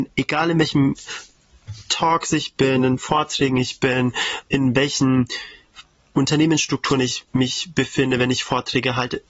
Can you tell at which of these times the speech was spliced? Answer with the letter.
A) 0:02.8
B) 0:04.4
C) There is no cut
C